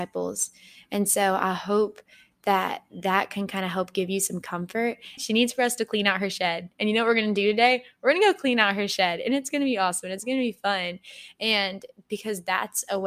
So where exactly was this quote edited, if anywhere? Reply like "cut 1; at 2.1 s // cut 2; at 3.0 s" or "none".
cut 1; at 5.2 s